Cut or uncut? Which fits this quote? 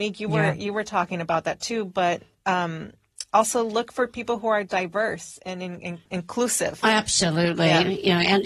cut